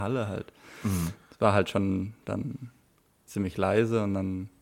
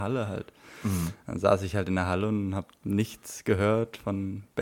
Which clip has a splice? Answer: first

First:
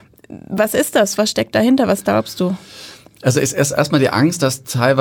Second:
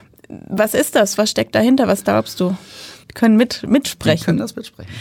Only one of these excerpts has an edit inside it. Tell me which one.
second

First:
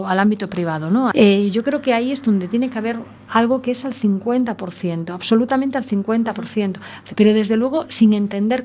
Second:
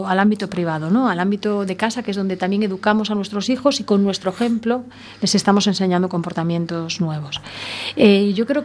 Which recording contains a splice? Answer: first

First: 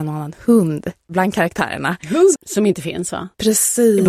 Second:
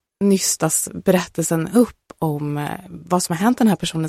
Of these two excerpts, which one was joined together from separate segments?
first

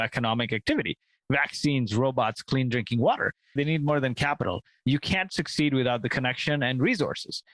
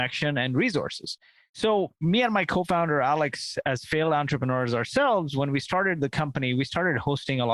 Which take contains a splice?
first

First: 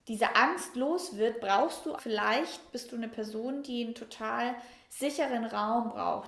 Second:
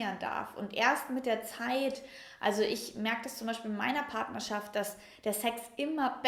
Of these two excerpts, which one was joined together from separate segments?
first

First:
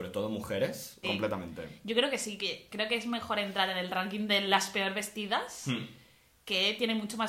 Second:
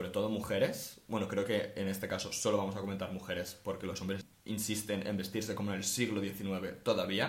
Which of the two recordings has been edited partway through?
first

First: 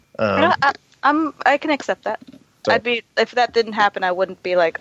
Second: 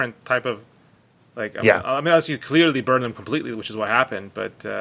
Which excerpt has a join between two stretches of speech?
first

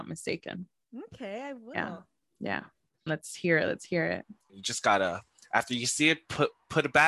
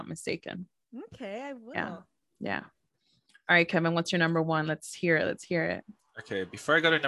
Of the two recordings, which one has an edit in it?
first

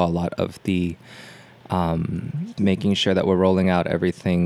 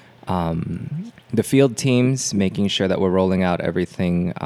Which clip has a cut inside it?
first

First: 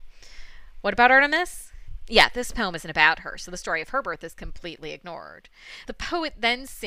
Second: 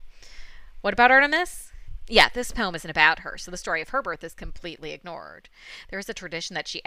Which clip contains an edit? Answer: first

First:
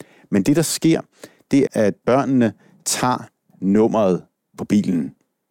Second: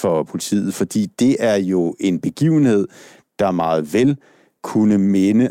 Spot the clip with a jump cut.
first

